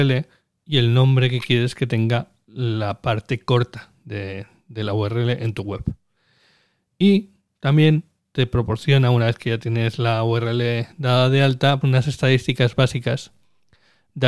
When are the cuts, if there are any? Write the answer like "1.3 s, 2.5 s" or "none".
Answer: 11.8 s